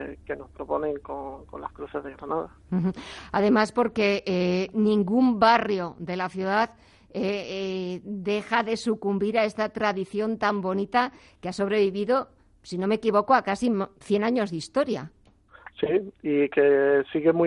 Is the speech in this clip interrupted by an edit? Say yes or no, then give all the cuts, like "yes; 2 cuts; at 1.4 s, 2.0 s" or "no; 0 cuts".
no; 0 cuts